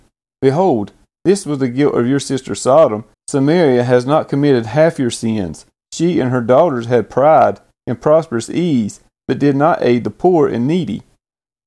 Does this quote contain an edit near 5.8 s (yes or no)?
yes